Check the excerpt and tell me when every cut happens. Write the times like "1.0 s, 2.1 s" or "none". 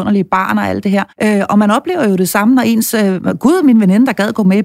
1.1 s